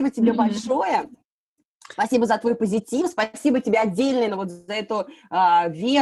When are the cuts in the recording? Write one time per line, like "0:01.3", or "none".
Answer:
0:04.3